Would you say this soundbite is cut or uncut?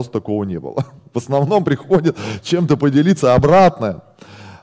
uncut